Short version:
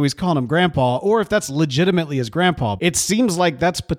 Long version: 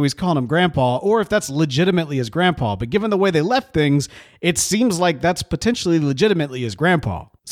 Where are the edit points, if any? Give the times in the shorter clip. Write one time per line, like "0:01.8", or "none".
0:02.8